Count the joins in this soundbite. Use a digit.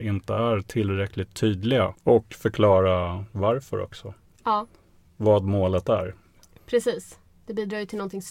2